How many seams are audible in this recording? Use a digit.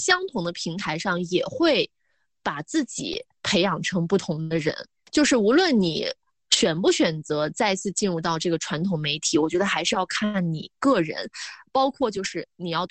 0